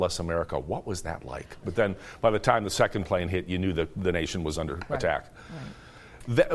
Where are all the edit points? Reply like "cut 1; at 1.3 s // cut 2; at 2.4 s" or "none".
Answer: cut 1; at 1.6 s